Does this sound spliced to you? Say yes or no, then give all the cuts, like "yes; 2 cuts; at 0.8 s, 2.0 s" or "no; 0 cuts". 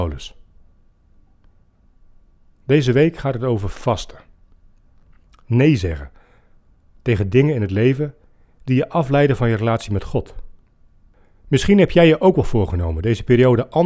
no; 0 cuts